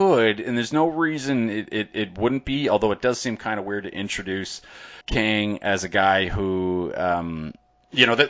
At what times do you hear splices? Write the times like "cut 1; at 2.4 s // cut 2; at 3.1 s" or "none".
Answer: cut 1; at 5.0 s